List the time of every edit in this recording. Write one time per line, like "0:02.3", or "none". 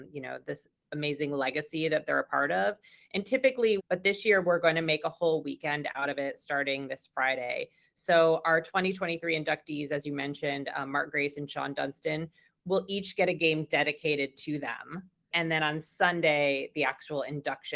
0:03.8
0:15.3